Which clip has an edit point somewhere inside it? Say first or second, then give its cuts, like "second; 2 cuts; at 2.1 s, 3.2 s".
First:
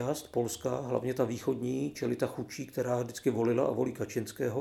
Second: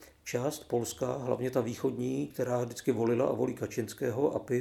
second; 1 cut; at 2.3 s